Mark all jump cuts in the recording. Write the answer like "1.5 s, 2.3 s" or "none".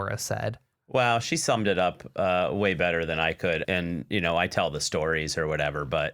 3.6 s